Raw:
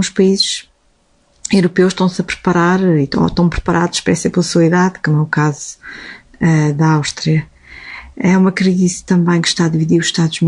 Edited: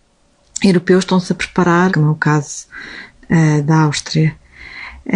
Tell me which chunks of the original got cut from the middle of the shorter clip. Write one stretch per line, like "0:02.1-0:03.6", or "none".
0:02.8-0:05.0